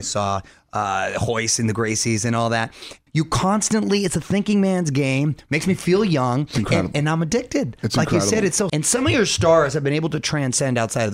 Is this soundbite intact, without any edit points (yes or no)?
no